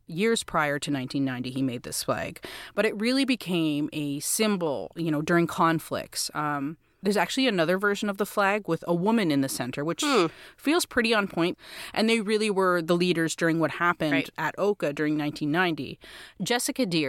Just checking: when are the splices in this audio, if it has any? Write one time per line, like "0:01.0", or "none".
none

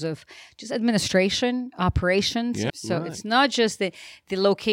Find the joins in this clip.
0:02.7

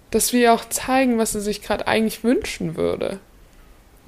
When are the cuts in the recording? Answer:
none

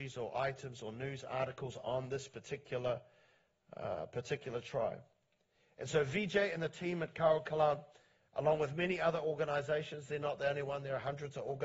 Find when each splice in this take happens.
none

